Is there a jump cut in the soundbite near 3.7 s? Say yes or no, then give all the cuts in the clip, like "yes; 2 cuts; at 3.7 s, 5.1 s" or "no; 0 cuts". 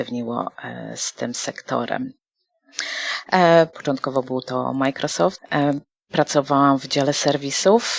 yes; 2 cuts; at 3.7 s, 5.4 s